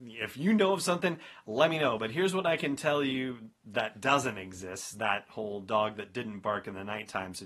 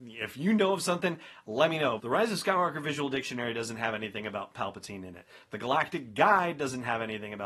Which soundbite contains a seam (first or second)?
second